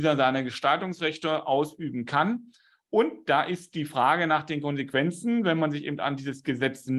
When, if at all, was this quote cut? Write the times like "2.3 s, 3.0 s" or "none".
none